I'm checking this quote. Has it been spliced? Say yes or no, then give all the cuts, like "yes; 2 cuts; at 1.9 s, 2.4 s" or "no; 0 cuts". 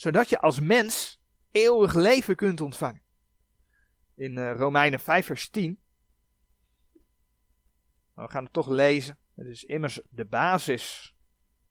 yes; 2 cuts; at 8.0 s, 9.2 s